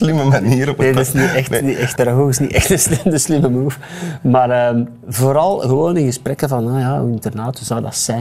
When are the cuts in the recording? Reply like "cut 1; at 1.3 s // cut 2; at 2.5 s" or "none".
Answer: cut 1; at 2.0 s